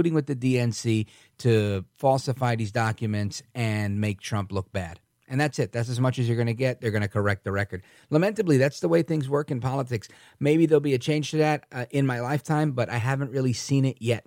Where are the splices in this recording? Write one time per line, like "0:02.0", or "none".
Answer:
none